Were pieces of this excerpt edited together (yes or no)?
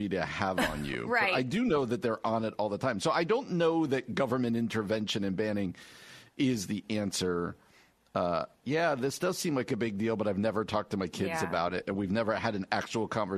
yes